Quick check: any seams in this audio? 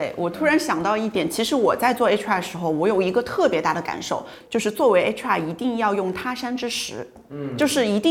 no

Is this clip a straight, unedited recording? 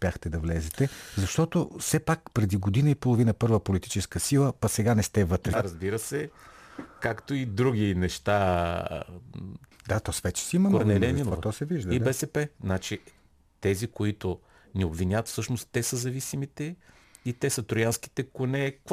no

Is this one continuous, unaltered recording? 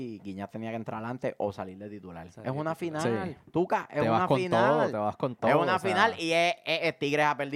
yes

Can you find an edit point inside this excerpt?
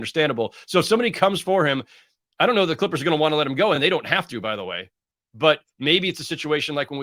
no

